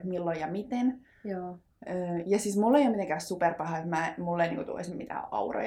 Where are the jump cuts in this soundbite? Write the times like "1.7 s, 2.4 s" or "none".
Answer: none